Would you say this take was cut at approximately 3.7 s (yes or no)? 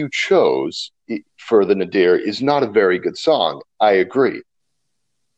no